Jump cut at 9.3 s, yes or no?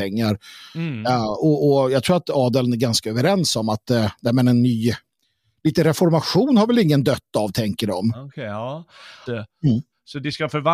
yes